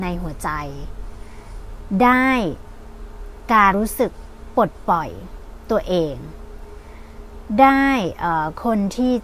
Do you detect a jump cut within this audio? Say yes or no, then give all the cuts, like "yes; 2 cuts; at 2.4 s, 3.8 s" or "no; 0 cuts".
yes; 1 cut; at 3.7 s